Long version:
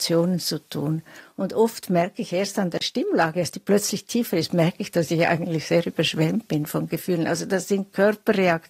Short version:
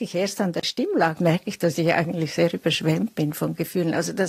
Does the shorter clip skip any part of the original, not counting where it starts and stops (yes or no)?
yes